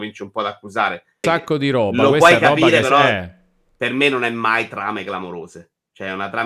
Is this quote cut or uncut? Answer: cut